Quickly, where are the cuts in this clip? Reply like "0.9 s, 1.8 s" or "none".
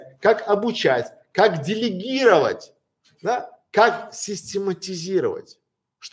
none